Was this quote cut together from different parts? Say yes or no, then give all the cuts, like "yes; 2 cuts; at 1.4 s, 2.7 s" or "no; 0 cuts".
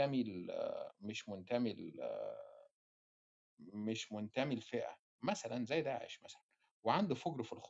no; 0 cuts